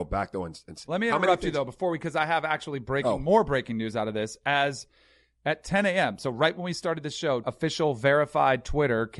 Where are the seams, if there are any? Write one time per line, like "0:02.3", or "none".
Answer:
0:07.4